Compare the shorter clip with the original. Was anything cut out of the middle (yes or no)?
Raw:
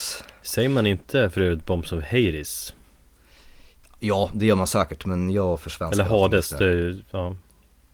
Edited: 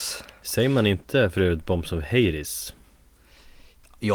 no